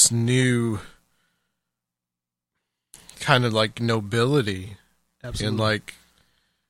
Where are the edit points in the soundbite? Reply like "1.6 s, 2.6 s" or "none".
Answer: none